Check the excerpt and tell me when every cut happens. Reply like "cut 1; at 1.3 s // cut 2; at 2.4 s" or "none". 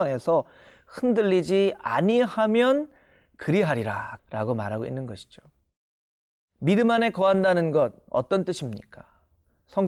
cut 1; at 4.2 s